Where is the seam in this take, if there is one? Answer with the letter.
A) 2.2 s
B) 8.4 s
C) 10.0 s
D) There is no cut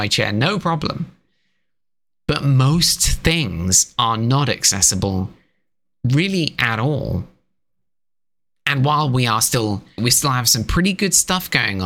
C